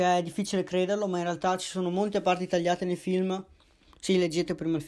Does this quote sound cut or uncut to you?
cut